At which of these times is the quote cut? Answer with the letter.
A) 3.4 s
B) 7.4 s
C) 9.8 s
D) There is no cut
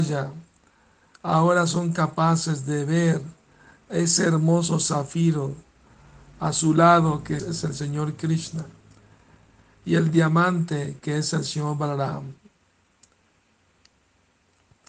B